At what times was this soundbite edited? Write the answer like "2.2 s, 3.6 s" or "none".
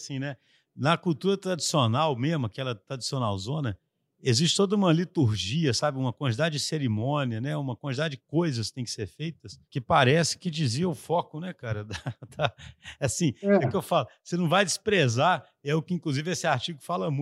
9.7 s